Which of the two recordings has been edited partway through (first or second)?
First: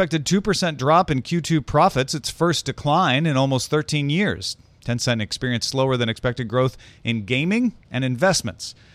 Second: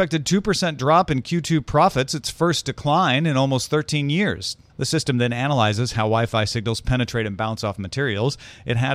second